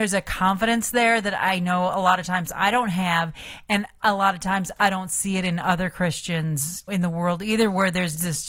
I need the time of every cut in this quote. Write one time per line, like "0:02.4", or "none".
0:06.9